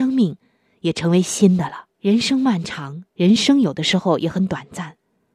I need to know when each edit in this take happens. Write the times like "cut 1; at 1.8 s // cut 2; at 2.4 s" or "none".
cut 1; at 1.9 s // cut 2; at 3.1 s